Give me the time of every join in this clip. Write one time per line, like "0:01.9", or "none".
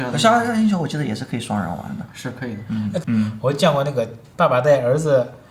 0:03.0